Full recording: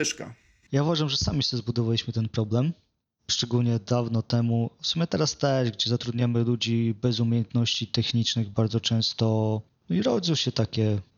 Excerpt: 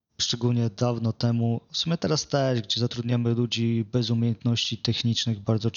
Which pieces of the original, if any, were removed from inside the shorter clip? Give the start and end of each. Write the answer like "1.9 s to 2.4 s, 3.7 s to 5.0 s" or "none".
none